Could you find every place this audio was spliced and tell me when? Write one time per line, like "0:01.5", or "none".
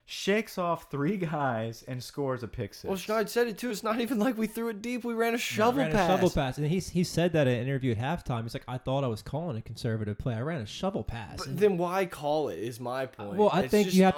none